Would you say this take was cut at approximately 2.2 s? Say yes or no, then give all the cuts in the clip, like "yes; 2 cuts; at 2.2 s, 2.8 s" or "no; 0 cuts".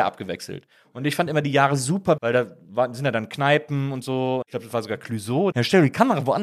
yes; 3 cuts; at 2.2 s, 4.4 s, 5.5 s